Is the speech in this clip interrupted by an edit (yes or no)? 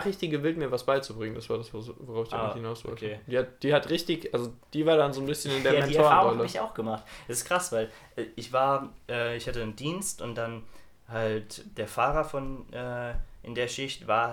no